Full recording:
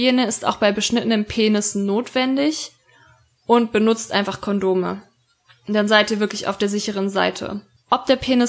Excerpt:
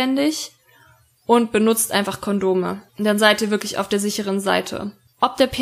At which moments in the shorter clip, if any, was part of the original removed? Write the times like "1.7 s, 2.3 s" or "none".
2.9 s